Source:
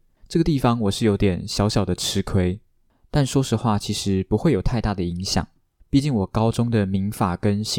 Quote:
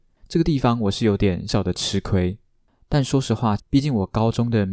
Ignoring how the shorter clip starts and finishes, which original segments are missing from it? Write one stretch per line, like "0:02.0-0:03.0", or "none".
0:01.5-0:01.7
0:03.8-0:05.8

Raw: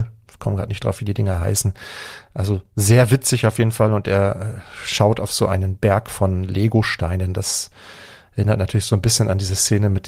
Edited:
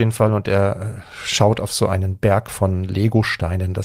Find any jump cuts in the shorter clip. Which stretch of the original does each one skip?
none

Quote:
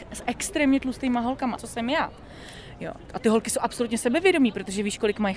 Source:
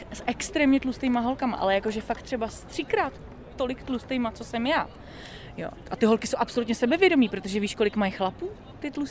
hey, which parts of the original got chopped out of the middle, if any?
0:01.6-0:04.3

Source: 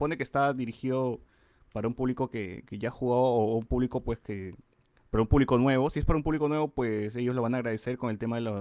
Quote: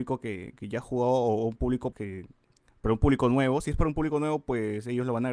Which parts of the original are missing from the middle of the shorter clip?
0:04.0-0:04.2

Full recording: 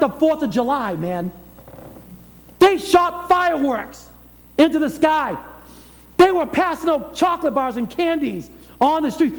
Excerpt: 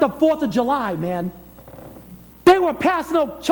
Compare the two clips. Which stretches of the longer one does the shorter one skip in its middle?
0:02.3-0:06.0

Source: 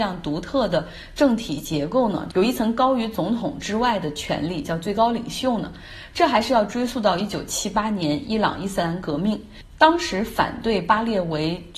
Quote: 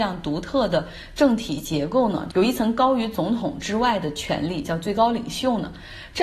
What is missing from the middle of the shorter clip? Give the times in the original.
none

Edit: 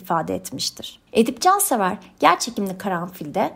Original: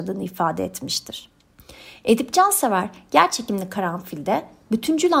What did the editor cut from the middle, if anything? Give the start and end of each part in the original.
0:01.4-0:02.0

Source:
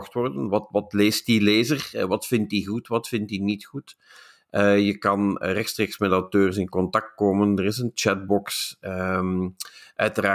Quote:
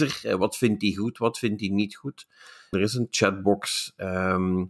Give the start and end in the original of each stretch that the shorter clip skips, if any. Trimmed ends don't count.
0:04.4-0:07.6

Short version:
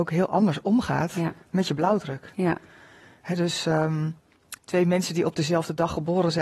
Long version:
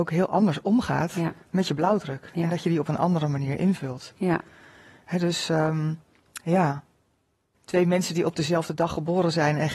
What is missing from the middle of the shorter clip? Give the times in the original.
0:02.3-0:04.1
0:06.4-0:07.6

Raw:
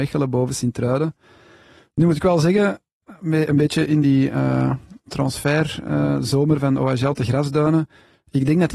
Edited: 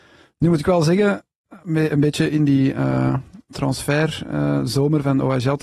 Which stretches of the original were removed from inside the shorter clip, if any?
none

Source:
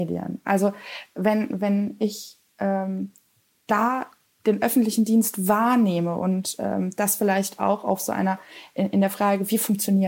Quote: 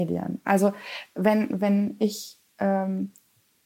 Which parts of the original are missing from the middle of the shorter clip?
none

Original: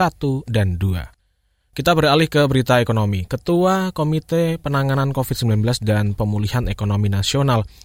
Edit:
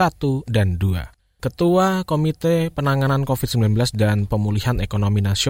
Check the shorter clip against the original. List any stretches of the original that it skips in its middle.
0:01.4-0:03.3

